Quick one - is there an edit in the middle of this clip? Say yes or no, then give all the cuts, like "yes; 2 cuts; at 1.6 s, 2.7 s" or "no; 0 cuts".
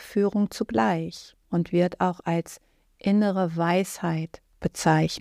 yes; 1 cut; at 1.4 s